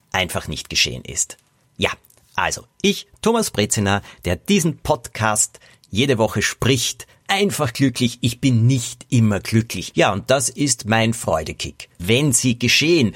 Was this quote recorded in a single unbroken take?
no; 3 cuts; at 7.2 s, 9.9 s, 12.0 s

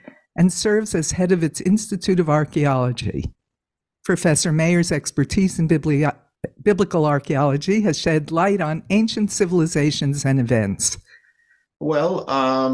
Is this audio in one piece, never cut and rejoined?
no; 1 cut; at 11.7 s

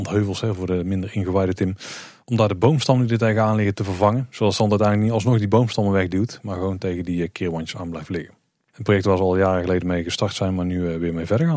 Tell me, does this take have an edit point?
no; 0 cuts

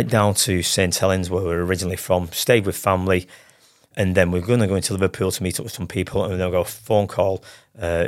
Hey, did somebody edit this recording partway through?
yes; 1 cut; at 3.9 s

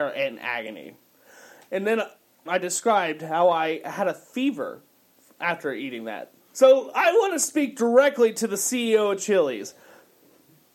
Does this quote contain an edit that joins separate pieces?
yes; 2 cuts; at 2.5 s, 6.5 s

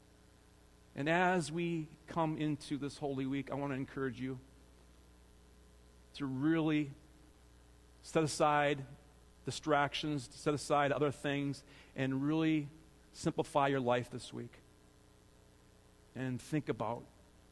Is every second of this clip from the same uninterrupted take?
yes; 0 cuts

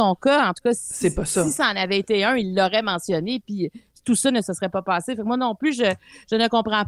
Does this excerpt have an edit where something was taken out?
no; 0 cuts

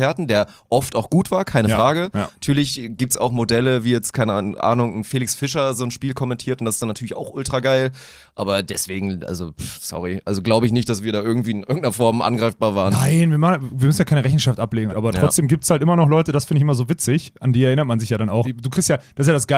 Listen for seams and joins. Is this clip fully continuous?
no; 2 cuts; at 14.9 s, 18.4 s

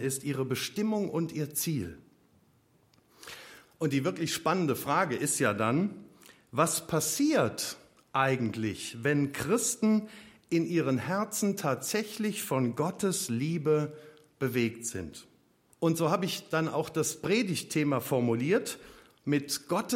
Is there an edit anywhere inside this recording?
yes; 1 cut; at 15.7 s

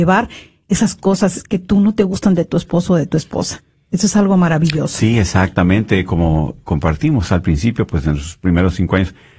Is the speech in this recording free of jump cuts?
yes; 0 cuts

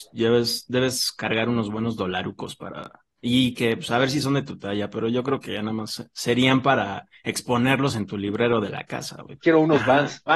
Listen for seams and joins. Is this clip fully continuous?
no; 1 cut; at 9.4 s

